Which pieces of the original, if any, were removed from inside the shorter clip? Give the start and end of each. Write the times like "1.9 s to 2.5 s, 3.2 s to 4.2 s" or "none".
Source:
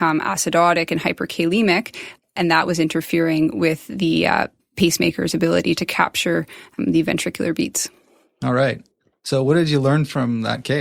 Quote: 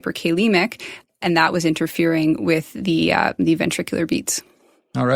4.5 s to 6.9 s